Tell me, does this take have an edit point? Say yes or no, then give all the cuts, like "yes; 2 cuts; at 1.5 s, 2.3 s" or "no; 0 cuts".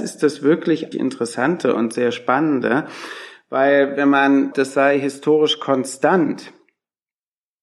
yes; 2 cuts; at 0.9 s, 4.5 s